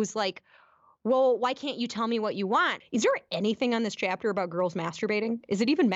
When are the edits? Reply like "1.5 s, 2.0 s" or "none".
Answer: 2.8 s